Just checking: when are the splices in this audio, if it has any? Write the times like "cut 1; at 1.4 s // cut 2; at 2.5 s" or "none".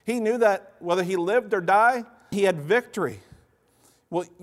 cut 1; at 2.3 s